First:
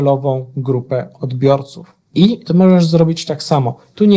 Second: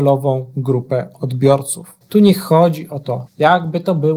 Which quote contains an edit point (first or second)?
second